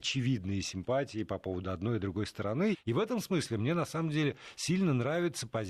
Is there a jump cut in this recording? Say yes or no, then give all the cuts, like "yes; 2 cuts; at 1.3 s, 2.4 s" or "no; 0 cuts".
yes; 1 cut; at 2.7 s